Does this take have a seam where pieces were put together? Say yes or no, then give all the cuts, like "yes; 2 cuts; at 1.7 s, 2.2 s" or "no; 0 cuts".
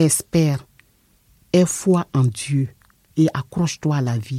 no; 0 cuts